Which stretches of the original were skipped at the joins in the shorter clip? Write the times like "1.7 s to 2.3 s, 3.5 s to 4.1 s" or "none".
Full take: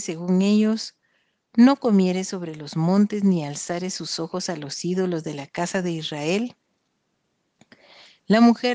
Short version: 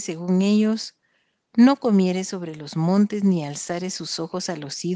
none